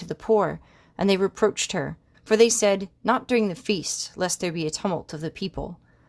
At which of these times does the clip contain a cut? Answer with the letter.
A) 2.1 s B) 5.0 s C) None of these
A